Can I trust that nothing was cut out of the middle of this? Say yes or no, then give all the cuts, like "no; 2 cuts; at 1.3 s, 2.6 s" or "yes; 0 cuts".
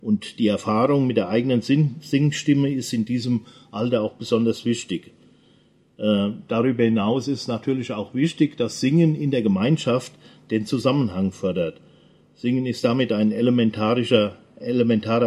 yes; 0 cuts